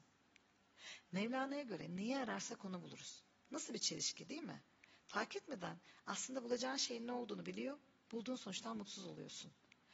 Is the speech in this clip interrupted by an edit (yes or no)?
no